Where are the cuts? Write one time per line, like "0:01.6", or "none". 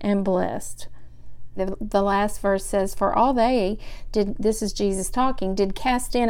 0:01.6